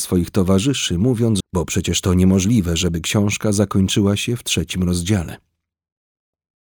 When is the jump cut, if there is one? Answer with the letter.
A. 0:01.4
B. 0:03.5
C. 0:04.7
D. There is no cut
A